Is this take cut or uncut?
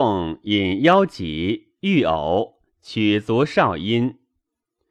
uncut